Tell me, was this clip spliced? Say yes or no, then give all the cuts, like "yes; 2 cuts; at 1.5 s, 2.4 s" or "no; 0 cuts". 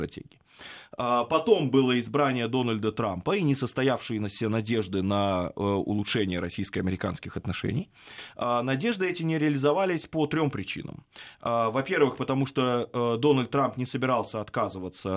no; 0 cuts